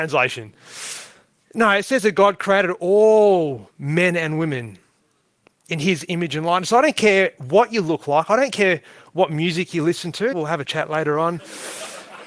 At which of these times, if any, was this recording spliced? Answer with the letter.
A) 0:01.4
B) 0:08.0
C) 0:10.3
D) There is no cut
C